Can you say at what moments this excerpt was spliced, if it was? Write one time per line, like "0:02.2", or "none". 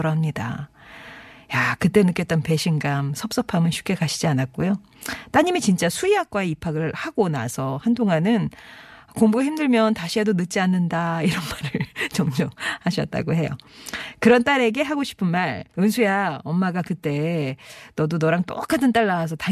0:15.7